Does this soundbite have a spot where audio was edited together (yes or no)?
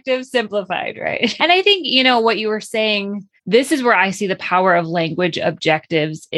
yes